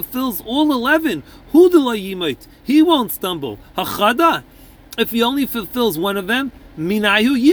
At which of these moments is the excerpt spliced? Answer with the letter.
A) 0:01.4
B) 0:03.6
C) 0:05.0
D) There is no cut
D